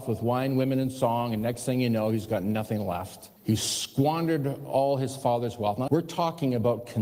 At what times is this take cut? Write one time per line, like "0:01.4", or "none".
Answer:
0:03.4
0:05.9